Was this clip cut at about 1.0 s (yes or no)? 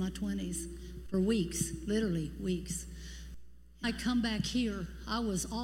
no